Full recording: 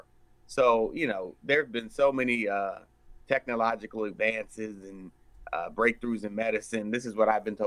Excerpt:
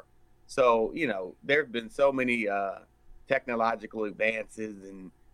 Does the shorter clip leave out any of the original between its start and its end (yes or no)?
no